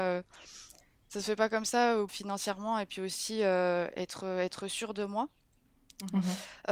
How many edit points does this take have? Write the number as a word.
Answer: one